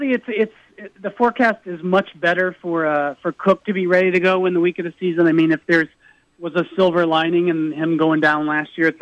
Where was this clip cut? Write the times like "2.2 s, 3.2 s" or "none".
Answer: none